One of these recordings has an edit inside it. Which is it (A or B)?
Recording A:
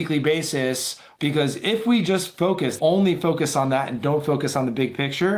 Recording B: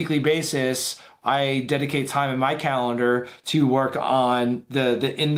A